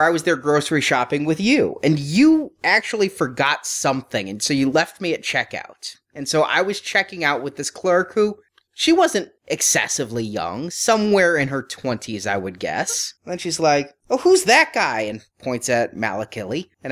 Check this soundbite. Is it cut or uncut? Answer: cut